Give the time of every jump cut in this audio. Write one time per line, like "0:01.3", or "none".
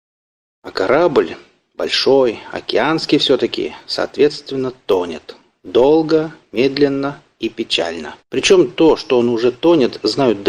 0:08.2